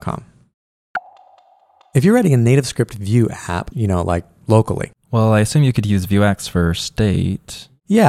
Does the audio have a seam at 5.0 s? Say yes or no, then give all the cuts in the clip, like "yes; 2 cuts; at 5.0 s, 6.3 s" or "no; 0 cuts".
no; 1 cut; at 3.7 s